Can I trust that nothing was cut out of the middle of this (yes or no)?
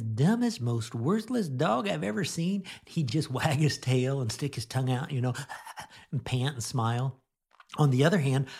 yes